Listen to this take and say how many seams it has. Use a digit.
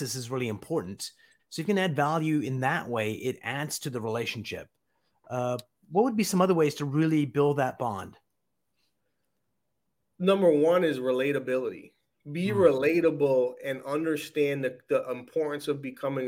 1